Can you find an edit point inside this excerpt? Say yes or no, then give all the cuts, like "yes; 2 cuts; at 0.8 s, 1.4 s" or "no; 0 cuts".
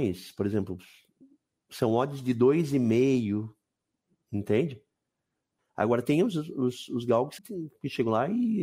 yes; 2 cuts; at 5.6 s, 7.4 s